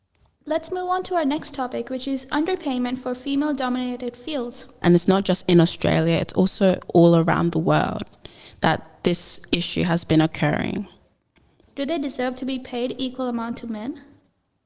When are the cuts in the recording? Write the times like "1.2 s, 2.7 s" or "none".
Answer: 4.8 s, 11.7 s